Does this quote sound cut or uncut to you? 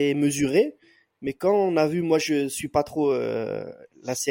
uncut